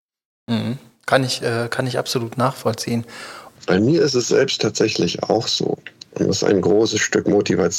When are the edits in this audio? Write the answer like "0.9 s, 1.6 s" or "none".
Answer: 3.5 s